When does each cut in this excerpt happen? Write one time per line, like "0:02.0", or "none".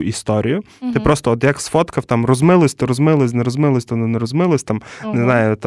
none